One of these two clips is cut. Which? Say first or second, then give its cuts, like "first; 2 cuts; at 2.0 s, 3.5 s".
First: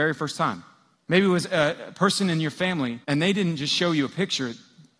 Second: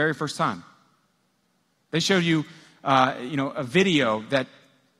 first; 2 cuts; at 0.9 s, 3.0 s